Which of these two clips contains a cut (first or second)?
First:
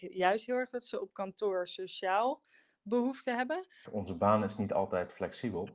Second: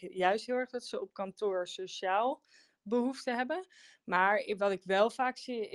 first